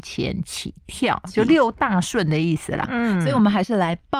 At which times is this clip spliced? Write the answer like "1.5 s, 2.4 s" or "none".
1.5 s, 2.8 s

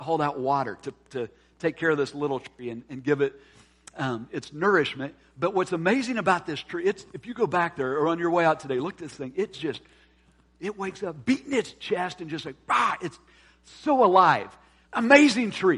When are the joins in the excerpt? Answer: 14.8 s

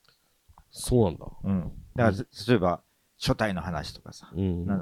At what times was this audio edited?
1.9 s

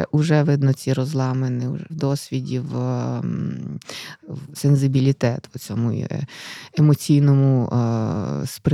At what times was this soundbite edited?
1.9 s, 4.5 s

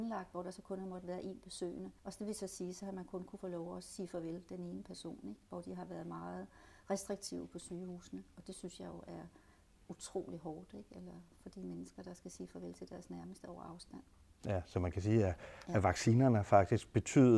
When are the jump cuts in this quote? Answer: 2.0 s

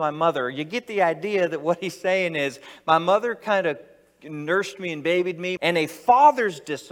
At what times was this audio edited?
5.6 s

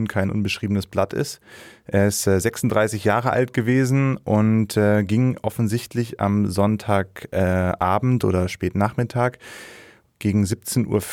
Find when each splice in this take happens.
none

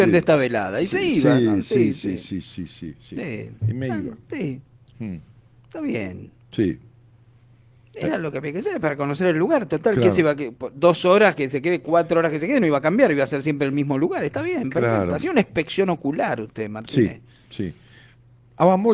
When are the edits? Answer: none

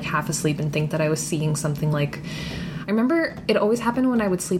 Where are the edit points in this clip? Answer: none

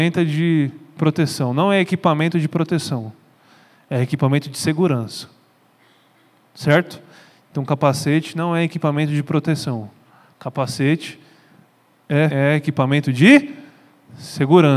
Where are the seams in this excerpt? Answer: 12.3 s

